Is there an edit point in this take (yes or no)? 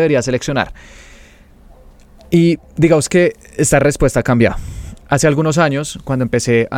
no